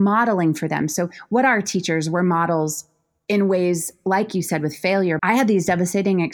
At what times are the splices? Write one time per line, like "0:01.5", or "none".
0:05.2